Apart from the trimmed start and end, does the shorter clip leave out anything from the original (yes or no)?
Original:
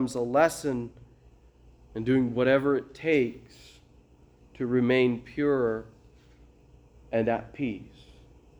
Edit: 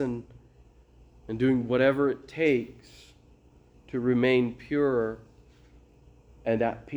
no